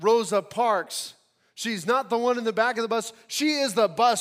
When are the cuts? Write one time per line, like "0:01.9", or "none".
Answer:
none